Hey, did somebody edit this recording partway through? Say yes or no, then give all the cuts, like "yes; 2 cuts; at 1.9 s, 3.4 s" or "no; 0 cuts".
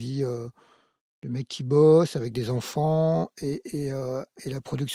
no; 0 cuts